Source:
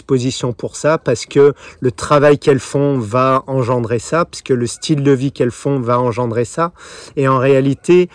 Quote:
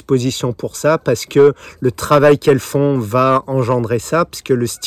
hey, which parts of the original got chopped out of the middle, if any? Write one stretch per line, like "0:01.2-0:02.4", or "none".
none